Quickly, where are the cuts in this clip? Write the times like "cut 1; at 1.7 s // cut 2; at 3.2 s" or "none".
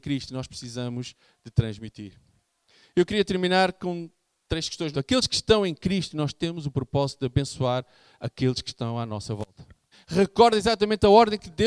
cut 1; at 4.9 s // cut 2; at 9.9 s